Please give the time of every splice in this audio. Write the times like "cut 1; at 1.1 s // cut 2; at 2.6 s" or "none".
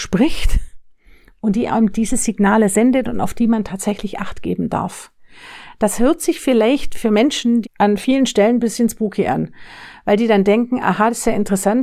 cut 1; at 7.6 s